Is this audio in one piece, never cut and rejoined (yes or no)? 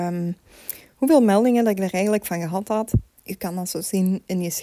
yes